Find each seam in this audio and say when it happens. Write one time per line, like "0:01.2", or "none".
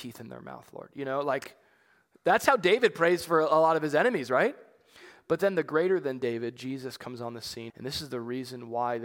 0:07.7